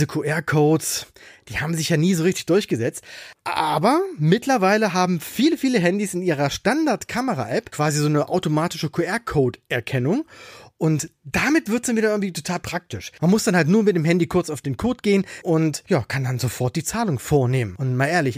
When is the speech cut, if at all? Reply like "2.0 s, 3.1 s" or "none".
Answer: none